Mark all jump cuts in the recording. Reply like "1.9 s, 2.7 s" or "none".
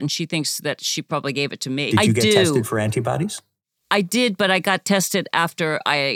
1.9 s